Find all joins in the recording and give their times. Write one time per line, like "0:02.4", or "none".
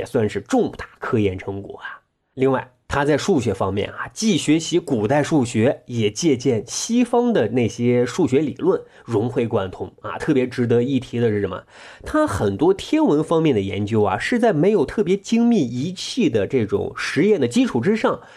none